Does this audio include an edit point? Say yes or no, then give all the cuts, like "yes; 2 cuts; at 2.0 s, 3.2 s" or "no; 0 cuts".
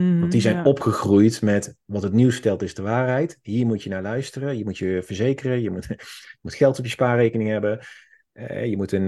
no; 0 cuts